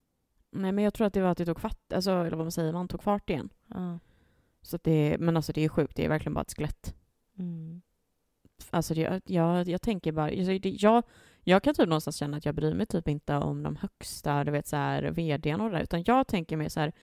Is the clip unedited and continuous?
yes; 0 cuts

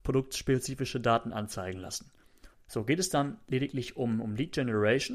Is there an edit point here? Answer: yes; 1 cut; at 2.5 s

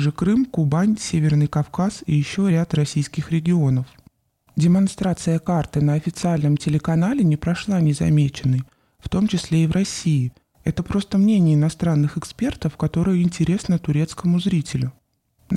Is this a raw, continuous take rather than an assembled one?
no; 1 cut; at 10.4 s

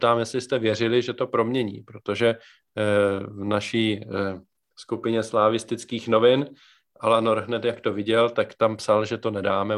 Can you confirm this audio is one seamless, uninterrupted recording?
yes; 0 cuts

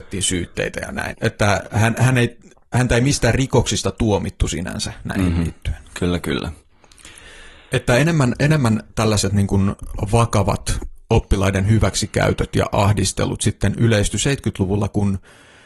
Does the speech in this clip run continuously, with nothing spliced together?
no; 1 cut; at 1.1 s

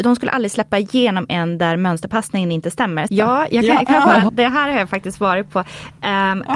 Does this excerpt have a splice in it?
yes; 2 cuts; at 3.1 s, 4.3 s

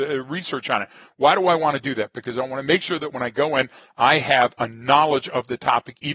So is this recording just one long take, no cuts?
yes; 0 cuts

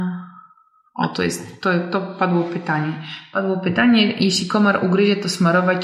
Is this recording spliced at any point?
no; 0 cuts

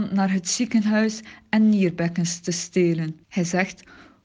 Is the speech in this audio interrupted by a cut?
yes; 1 cut; at 3.2 s

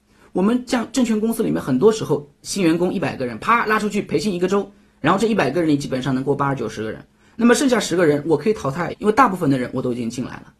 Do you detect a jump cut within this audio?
yes; 1 cut; at 8.9 s

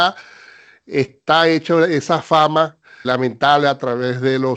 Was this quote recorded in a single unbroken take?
no; 1 cut; at 3.0 s

